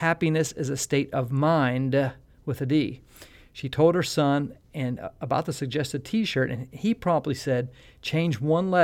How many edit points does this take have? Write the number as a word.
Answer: zero